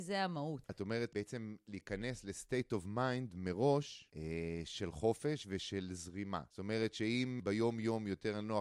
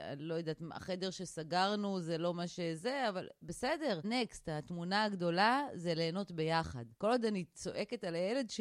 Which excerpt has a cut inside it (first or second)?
second